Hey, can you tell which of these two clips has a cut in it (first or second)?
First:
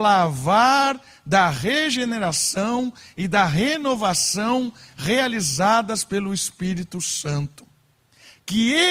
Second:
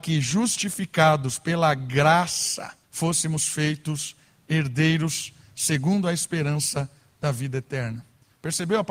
second